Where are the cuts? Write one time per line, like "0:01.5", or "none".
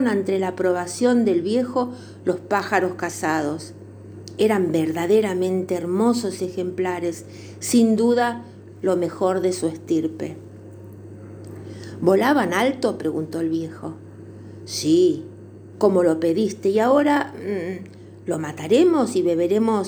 0:15.7